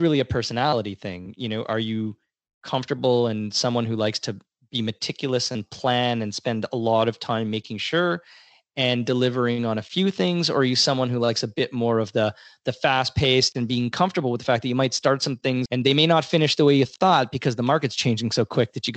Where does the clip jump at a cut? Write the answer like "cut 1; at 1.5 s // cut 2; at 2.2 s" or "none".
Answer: cut 1; at 15.7 s